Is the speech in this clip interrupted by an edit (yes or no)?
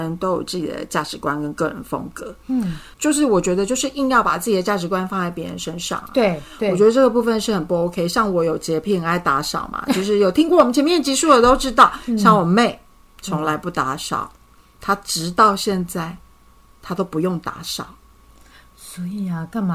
no